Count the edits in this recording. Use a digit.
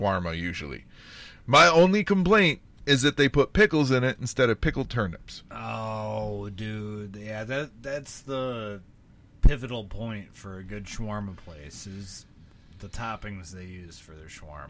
1